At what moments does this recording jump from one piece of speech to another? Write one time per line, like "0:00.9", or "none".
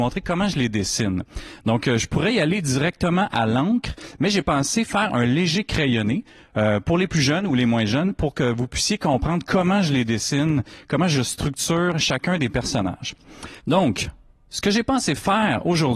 0:13.6